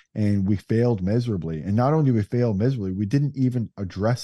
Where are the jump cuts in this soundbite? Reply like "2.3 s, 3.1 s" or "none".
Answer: none